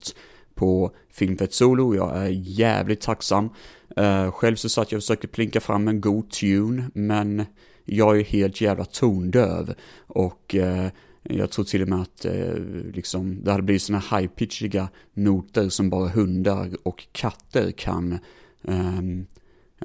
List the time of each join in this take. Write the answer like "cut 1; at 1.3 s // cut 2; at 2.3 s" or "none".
none